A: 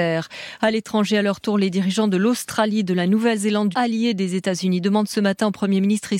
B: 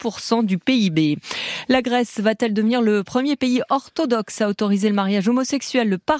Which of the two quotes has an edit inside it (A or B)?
A